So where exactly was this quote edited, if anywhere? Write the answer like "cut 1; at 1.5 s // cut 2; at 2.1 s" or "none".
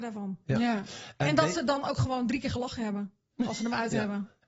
none